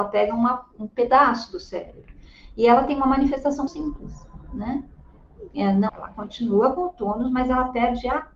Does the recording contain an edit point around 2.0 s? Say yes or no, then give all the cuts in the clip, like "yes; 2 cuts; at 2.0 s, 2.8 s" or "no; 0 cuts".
no; 2 cuts; at 3.7 s, 5.9 s